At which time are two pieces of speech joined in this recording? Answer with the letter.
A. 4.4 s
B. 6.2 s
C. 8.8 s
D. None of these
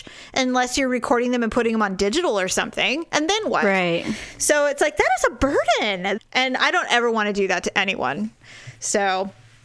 B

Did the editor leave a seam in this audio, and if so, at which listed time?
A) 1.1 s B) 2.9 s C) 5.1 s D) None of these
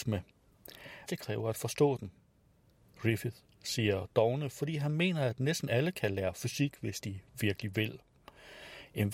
A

